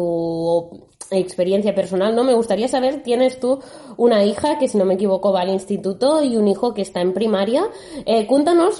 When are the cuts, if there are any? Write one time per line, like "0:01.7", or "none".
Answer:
none